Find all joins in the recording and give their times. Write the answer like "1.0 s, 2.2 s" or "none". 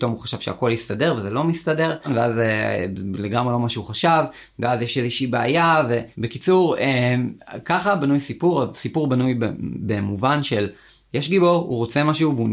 none